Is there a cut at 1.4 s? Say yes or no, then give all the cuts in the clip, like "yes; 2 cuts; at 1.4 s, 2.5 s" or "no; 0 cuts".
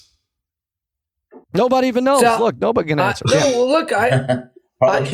yes; 1 cut; at 1.4 s